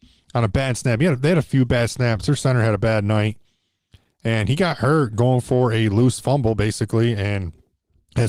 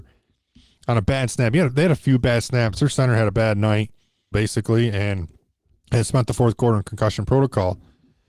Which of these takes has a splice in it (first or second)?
second